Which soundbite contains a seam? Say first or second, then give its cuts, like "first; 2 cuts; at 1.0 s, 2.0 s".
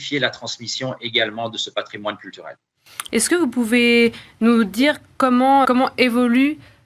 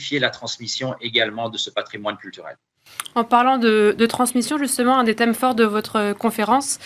first; 2 cuts; at 3.1 s, 5.6 s